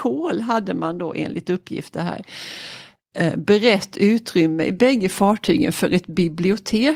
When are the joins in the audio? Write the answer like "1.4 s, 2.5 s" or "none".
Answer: none